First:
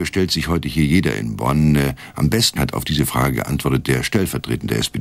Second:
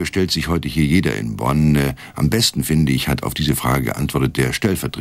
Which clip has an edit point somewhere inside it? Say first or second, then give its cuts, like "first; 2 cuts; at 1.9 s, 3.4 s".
first; 1 cut; at 2.6 s